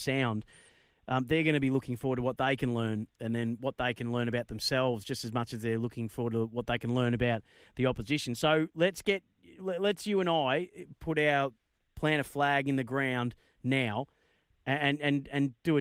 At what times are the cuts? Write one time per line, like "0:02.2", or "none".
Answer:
none